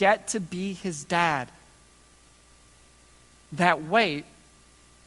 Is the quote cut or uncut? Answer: uncut